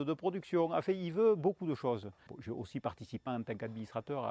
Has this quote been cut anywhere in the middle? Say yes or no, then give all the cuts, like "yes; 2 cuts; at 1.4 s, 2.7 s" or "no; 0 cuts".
yes; 2 cuts; at 2.3 s, 3.3 s